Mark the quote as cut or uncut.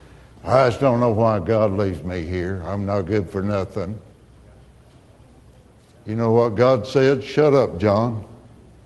uncut